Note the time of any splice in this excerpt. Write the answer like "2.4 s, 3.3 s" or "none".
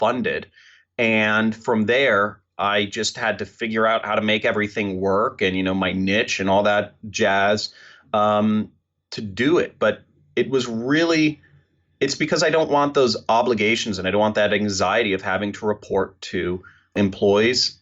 none